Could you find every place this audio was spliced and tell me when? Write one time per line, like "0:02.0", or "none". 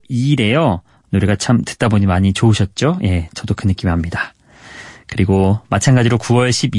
0:01.0